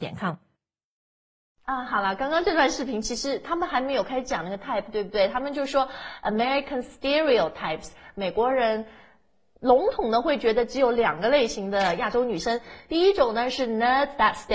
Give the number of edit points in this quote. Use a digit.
0